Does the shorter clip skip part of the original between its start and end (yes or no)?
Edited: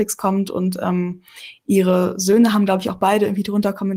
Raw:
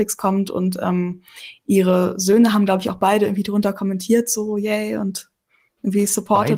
no